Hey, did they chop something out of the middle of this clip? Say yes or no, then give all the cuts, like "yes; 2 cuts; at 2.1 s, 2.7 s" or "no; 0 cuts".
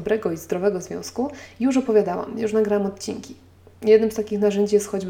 no; 0 cuts